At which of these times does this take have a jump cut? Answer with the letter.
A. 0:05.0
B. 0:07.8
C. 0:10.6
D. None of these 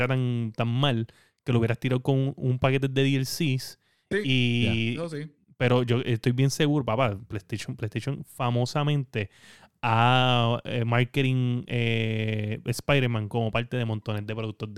D